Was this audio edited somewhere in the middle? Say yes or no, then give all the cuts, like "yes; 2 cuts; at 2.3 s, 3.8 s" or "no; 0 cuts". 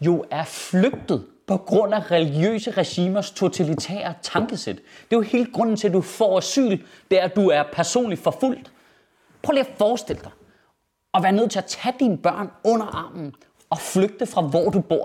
no; 0 cuts